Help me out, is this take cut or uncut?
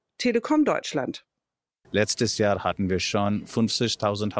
cut